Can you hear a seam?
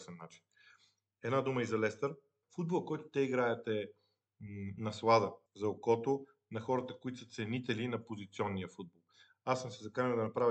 yes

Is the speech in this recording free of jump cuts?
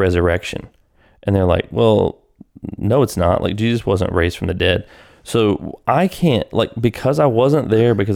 yes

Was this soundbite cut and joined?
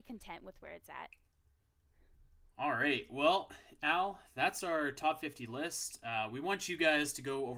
no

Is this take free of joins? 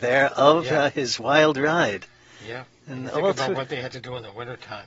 yes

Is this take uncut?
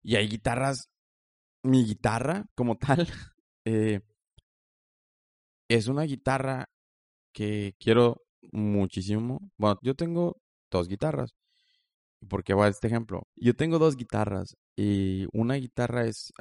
no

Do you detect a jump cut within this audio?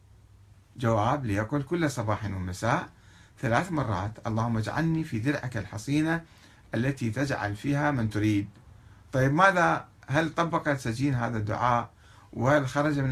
no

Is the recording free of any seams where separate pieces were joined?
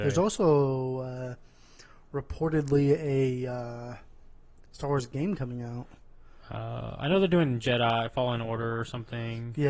yes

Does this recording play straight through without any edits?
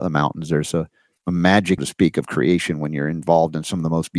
no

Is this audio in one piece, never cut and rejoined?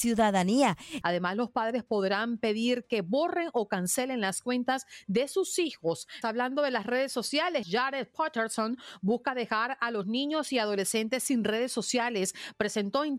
no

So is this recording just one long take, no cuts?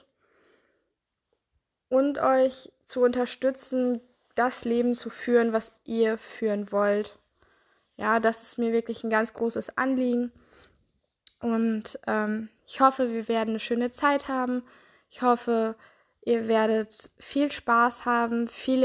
yes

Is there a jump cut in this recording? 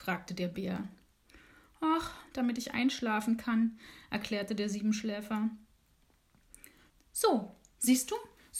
yes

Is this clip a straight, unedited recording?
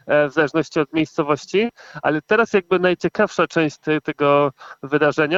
no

